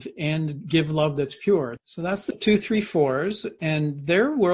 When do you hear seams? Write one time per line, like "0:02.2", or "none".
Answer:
0:01.8

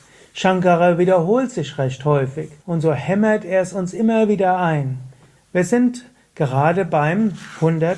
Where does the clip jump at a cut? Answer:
0:02.6
0:05.4

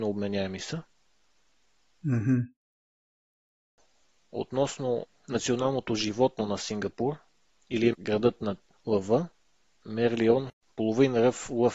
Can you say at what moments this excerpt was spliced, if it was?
none

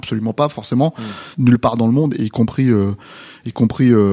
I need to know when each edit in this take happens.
0:01.3

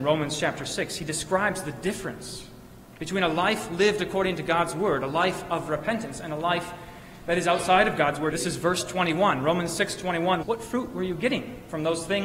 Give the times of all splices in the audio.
0:08.3
0:10.4

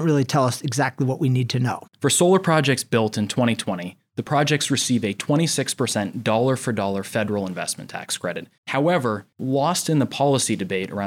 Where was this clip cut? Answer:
0:01.9
0:08.6

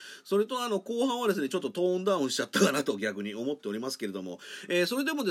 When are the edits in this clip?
none

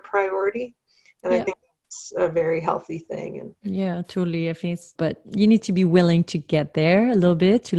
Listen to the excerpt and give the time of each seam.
0:05.0

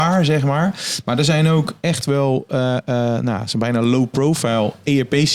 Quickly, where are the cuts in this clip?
none

